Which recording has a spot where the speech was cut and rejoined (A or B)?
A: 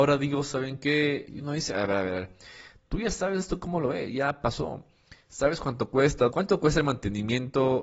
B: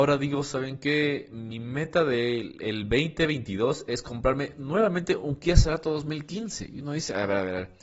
A